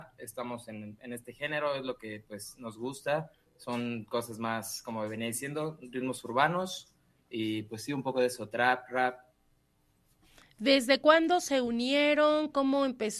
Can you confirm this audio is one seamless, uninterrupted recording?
yes; 0 cuts

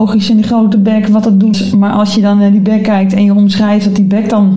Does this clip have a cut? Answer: yes; 1 cut; at 1.5 s

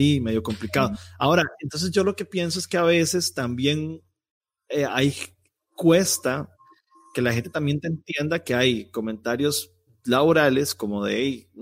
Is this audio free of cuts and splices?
yes; 0 cuts

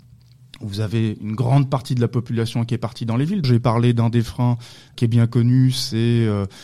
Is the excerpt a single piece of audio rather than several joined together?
no; 1 cut; at 3.4 s

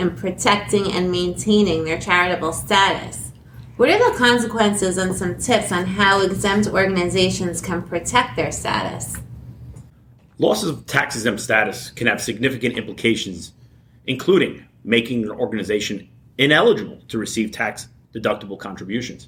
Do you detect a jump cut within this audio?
no; 0 cuts

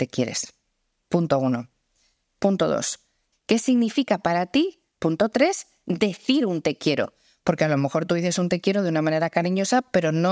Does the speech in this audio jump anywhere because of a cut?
yes; 1 cut; at 3.3 s

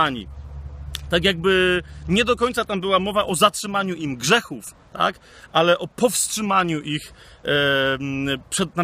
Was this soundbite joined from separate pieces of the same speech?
no; 0 cuts

